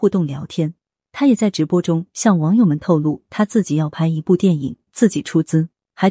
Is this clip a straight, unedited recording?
no; 1 cut; at 4.9 s

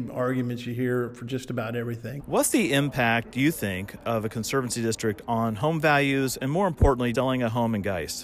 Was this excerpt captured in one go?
no; 2 cuts; at 2.2 s, 7.1 s

